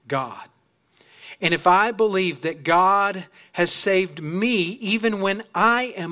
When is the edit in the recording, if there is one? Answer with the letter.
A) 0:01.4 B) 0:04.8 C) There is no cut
C